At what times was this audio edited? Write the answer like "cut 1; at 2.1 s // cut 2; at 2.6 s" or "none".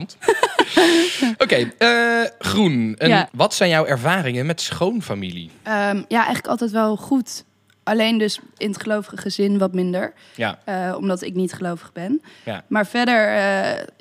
cut 1; at 3.3 s